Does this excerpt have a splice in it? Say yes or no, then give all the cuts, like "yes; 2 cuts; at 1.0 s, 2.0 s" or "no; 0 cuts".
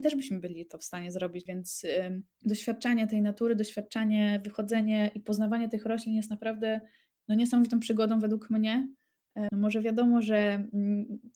yes; 2 cuts; at 1.5 s, 9.5 s